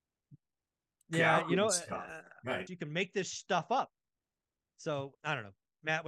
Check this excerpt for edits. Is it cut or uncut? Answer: cut